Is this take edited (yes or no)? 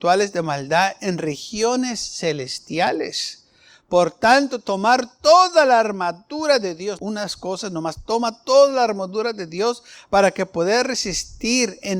yes